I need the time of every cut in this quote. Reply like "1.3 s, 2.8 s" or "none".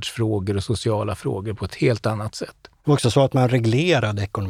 none